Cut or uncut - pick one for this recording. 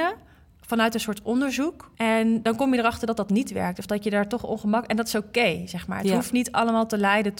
cut